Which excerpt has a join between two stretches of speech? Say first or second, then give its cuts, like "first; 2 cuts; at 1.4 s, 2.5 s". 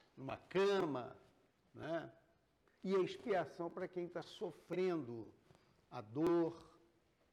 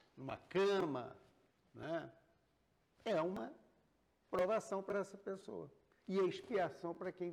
first; 1 cut; at 2.6 s